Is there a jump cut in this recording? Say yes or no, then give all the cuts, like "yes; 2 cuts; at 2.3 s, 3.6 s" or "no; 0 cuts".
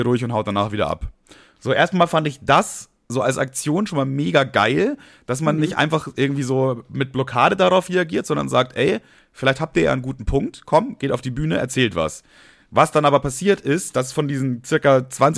no; 0 cuts